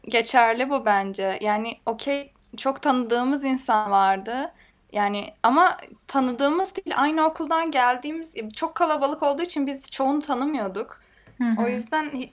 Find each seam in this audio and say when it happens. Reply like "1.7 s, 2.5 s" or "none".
none